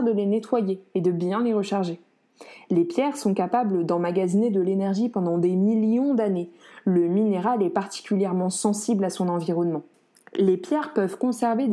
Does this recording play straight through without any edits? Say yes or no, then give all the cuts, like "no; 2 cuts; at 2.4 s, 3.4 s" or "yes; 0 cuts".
yes; 0 cuts